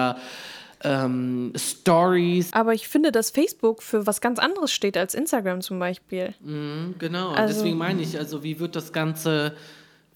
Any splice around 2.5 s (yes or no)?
yes